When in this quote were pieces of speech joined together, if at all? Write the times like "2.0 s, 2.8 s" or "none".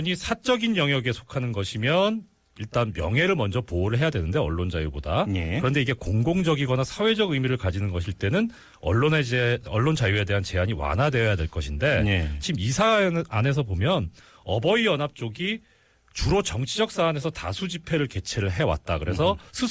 none